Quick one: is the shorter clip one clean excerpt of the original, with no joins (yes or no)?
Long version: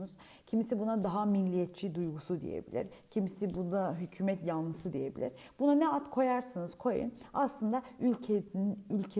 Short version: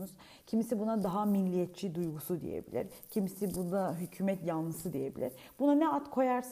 yes